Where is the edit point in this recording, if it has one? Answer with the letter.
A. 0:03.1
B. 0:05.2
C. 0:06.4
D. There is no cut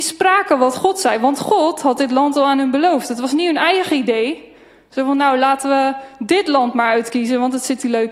D